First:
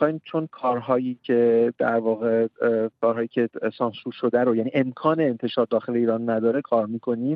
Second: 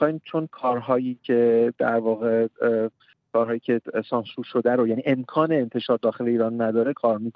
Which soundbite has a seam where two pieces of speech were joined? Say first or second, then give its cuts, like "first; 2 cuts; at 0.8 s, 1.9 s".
first; 1 cut; at 3.0 s